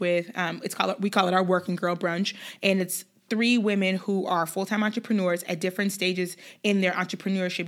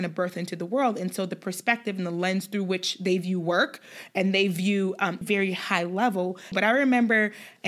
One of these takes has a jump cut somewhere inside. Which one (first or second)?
second